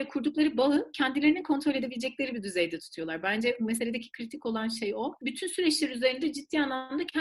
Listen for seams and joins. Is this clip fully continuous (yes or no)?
yes